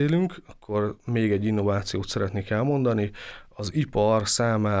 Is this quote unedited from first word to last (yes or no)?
yes